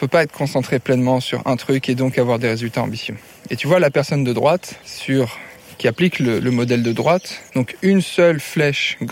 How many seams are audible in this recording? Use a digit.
0